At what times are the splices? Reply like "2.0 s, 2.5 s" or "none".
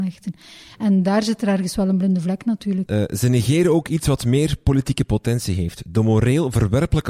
2.9 s